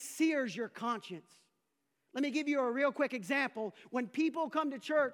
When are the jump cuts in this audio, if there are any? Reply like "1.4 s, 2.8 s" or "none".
none